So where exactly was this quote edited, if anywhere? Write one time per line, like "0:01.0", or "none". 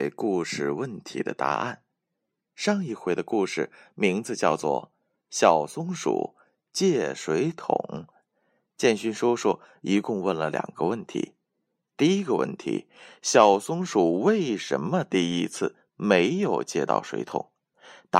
none